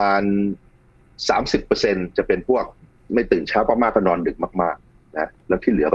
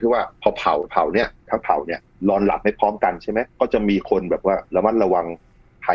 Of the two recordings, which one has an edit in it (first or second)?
second